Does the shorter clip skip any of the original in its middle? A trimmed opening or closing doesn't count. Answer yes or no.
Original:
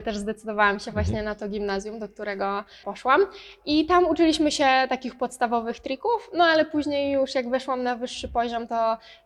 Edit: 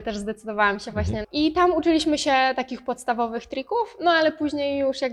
yes